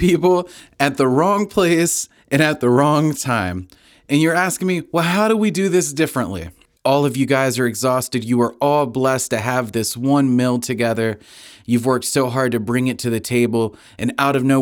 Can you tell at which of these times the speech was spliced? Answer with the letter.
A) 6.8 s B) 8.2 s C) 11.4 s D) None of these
A